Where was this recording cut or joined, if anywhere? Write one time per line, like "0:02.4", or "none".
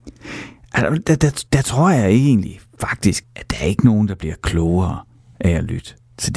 0:01.5
0:03.2